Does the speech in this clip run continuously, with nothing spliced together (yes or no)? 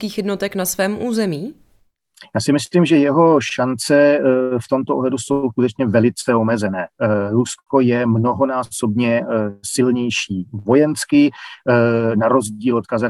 yes